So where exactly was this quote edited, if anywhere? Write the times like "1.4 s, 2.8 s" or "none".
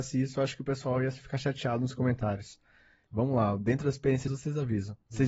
3.1 s, 4.3 s